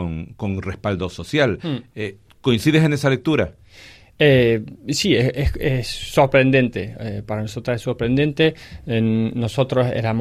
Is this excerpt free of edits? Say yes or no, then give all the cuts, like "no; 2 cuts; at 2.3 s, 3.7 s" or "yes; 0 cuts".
yes; 0 cuts